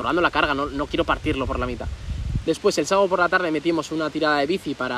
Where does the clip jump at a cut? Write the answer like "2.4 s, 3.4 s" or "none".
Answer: 2.4 s